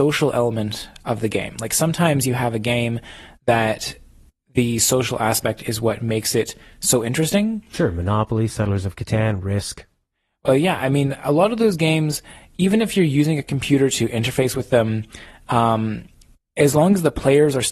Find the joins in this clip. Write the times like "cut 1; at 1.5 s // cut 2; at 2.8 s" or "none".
none